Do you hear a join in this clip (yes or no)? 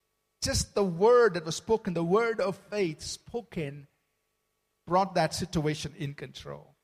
no